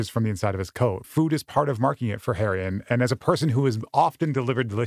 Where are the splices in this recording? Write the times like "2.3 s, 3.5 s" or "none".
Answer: 1.0 s